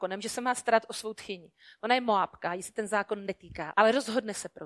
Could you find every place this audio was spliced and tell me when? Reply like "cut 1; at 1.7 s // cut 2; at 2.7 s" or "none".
cut 1; at 3.7 s